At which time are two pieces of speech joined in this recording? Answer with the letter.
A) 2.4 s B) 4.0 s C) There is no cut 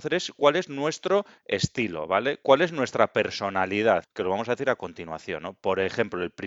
B